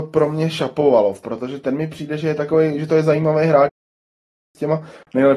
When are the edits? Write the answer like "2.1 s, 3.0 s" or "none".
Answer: none